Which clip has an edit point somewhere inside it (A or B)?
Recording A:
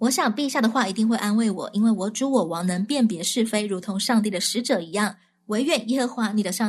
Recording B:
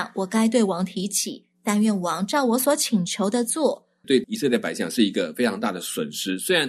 B